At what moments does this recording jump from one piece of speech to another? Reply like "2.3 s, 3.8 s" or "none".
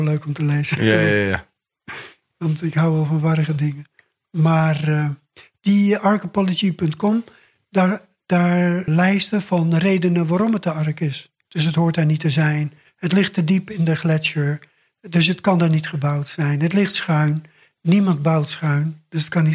8.9 s, 11.5 s